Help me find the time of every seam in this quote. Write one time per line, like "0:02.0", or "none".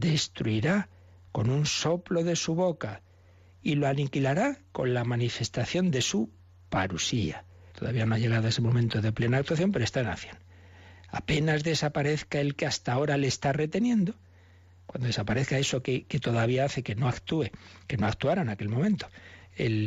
0:07.7